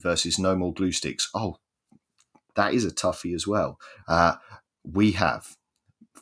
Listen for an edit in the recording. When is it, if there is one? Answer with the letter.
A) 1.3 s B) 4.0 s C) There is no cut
B